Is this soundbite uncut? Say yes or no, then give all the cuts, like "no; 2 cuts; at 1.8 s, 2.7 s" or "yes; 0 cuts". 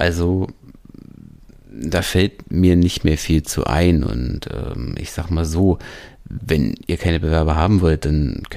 yes; 0 cuts